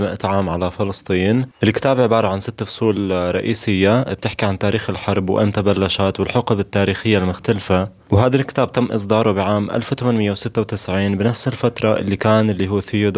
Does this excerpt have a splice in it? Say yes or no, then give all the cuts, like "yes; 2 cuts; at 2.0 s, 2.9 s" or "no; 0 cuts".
yes; 1 cut; at 8.1 s